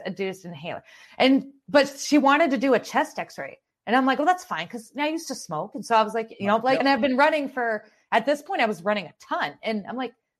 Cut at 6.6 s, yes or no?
yes